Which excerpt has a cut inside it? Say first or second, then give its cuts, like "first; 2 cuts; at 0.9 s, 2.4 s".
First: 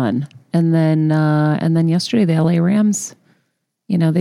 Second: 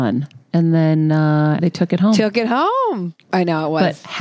second; 2 cuts; at 1.6 s, 3.3 s